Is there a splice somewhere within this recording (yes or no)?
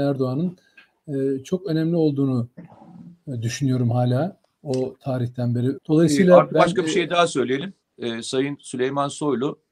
yes